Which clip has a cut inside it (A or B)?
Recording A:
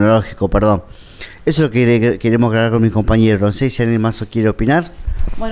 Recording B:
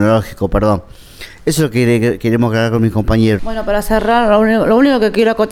B